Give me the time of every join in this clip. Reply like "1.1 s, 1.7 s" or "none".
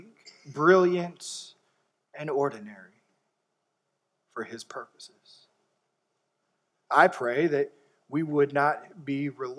none